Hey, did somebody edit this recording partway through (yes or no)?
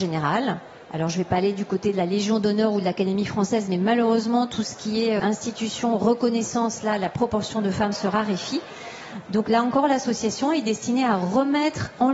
yes